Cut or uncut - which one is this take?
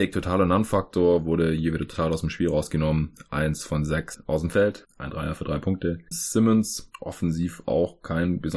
cut